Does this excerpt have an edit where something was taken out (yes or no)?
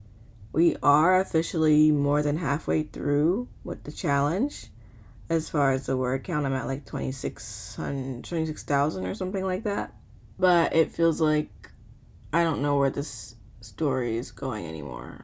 no